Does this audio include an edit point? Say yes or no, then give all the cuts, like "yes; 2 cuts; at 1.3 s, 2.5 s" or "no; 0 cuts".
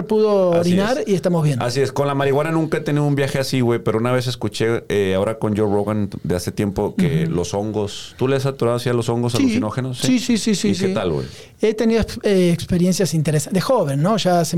no; 0 cuts